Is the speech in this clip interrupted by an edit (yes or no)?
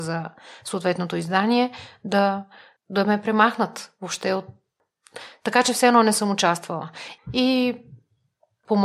yes